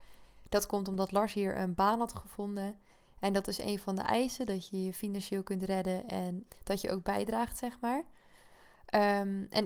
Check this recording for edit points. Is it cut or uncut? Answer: cut